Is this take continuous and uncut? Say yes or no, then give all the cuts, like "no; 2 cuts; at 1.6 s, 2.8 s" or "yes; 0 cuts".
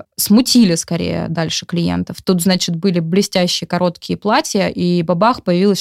no; 1 cut; at 2.2 s